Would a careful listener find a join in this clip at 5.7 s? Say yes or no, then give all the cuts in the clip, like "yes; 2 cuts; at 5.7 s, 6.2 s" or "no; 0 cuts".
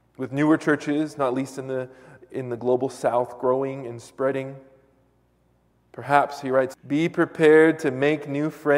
yes; 2 cuts; at 5.7 s, 6.7 s